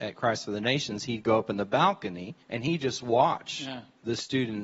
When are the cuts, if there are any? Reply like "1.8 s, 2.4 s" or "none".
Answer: 2.4 s

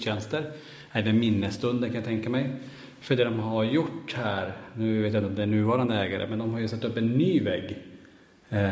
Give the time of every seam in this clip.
none

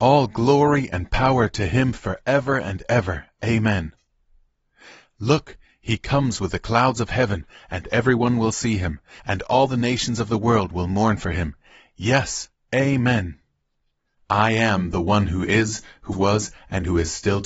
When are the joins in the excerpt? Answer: 9.2 s, 14.2 s, 16.1 s

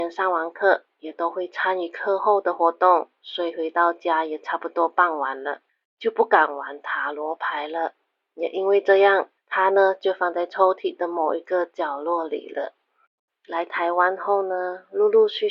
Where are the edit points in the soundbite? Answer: 9.4 s, 13.3 s

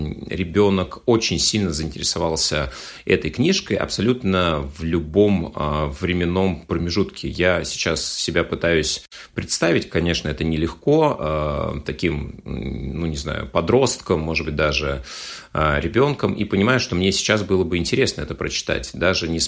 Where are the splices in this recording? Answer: none

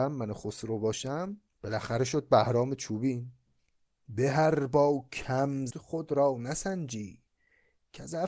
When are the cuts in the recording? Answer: 1.5 s, 5.7 s

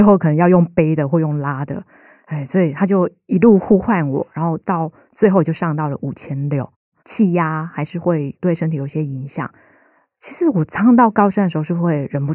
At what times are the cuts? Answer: 7.0 s

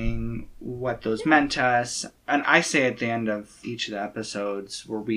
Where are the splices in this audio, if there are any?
2.4 s

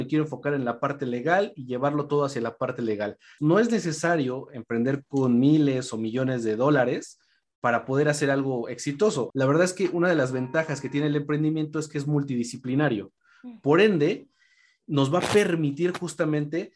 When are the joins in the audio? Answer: 3.4 s, 9.3 s

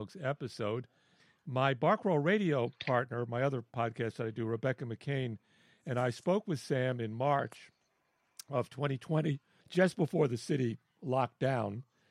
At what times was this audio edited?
none

